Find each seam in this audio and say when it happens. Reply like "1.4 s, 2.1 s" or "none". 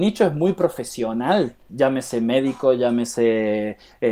1.7 s